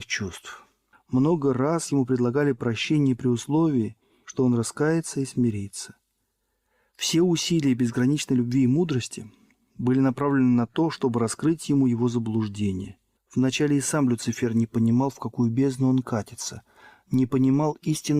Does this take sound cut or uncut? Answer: cut